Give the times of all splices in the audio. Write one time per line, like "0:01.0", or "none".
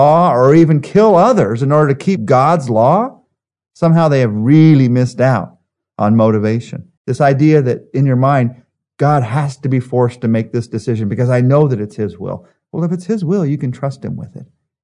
0:07.0